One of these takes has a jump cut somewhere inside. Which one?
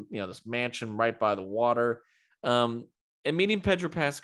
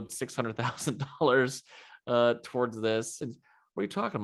first; 1 cut; at 2.3 s

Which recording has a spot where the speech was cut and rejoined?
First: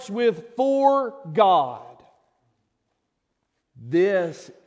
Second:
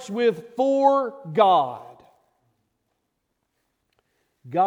first; 1 cut; at 3.6 s

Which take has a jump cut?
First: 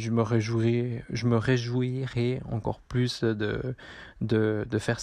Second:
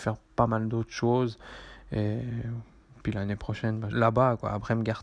second; 1 cut; at 3.9 s

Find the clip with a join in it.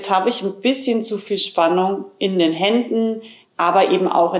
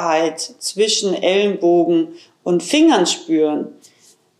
first; 1 cut; at 3.4 s

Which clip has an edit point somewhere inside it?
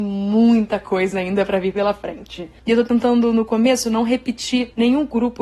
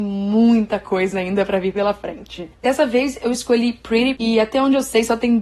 second; 2 cuts; at 2.5 s, 4.2 s

